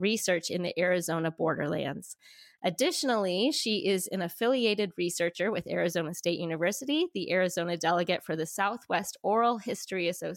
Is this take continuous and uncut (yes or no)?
yes